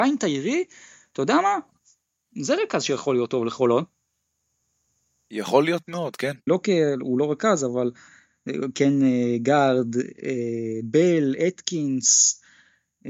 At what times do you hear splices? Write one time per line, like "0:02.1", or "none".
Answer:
0:06.5

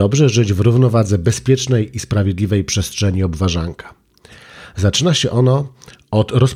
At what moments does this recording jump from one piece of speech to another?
none

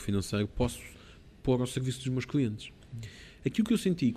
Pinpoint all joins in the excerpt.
none

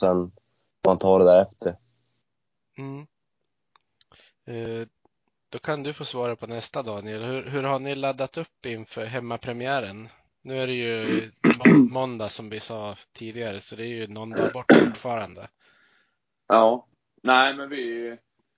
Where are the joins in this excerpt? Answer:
none

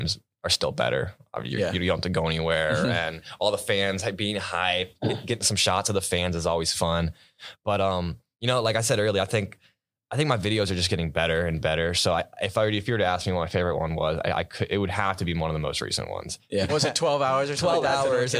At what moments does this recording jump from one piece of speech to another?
0:16.7

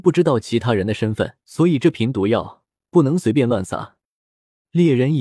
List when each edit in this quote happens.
0:01.4

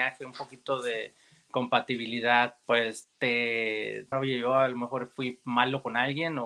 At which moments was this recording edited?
0:02.6
0:04.1

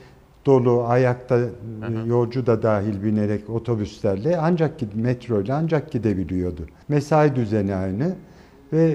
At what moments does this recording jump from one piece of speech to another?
0:06.8

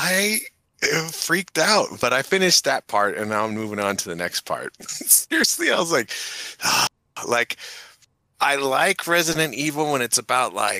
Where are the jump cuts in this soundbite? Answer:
none

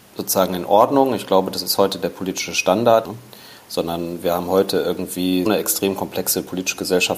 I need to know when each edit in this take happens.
0:03.0
0:05.5

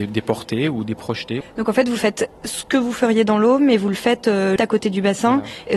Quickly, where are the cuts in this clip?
0:01.4
0:04.6

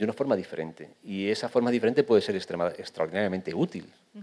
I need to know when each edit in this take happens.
none

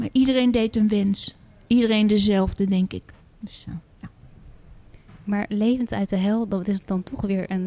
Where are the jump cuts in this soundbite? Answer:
0:03.2

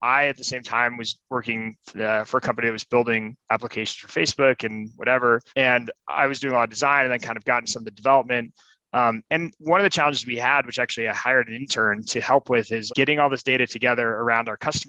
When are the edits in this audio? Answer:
0:05.5
0:12.9

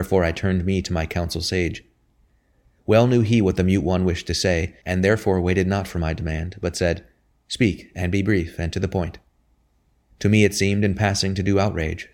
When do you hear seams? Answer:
0:10.1

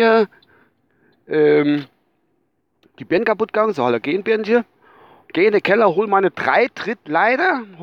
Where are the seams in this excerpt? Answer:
0:05.3

